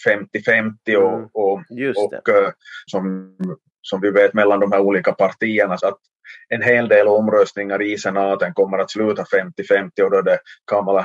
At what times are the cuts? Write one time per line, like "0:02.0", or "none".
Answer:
0:02.9
0:05.8